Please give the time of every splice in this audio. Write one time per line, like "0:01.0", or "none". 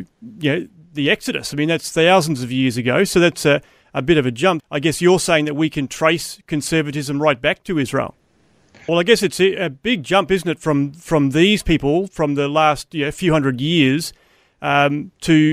0:04.6
0:08.9